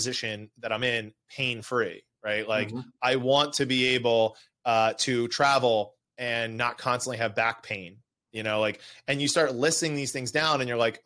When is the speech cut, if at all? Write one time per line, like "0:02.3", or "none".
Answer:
none